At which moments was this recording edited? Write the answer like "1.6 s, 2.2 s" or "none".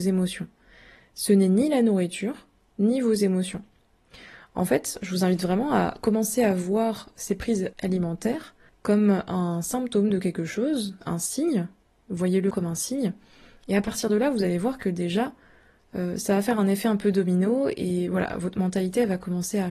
12.5 s